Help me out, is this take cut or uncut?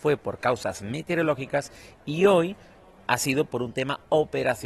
uncut